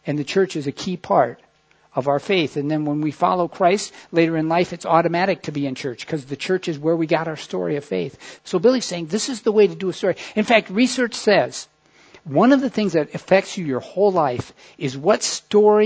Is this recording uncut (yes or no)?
no